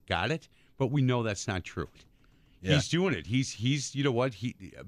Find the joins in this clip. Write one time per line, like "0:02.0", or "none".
0:02.0